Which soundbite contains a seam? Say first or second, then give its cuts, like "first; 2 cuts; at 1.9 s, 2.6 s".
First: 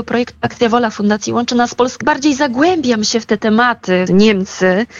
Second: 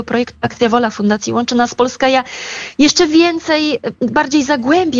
first; 2 cuts; at 2.0 s, 4.1 s